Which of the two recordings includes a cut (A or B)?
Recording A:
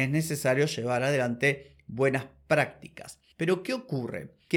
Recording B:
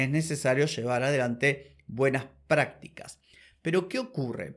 A